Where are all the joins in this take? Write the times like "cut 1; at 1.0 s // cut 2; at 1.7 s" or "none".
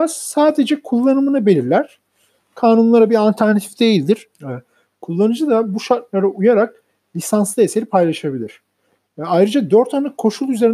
cut 1; at 4.3 s